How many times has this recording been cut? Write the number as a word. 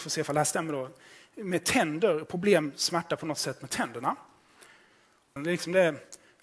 one